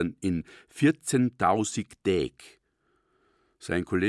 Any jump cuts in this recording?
no; 0 cuts

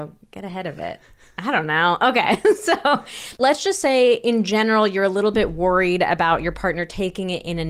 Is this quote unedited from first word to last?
yes; 0 cuts

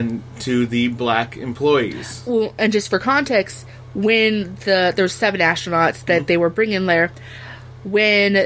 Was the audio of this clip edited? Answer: no; 0 cuts

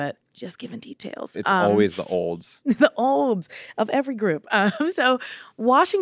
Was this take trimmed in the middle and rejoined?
no; 0 cuts

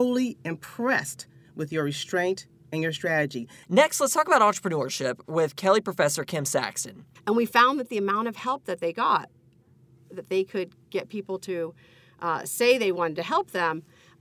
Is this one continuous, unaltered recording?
no; 2 cuts; at 3.6 s, 7.2 s

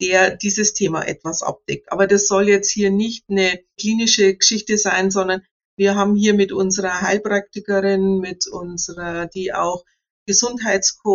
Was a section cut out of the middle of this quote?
no; 0 cuts

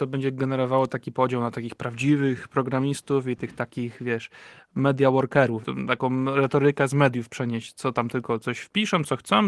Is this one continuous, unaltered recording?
no; 1 cut; at 5.6 s

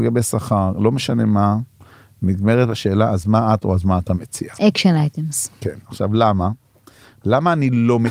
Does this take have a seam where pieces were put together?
no; 0 cuts

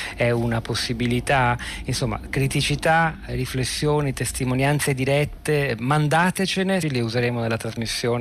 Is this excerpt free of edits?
no; 2 cuts; at 3.3 s, 6.8 s

